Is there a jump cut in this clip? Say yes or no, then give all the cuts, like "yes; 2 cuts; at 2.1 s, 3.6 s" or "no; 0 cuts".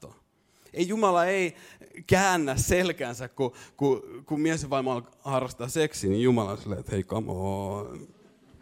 no; 0 cuts